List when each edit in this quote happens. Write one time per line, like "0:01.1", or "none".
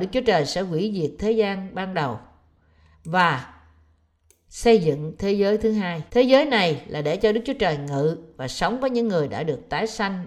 0:06.1